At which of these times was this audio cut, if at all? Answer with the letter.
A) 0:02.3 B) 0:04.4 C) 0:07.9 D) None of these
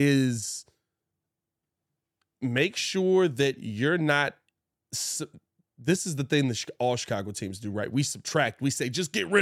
D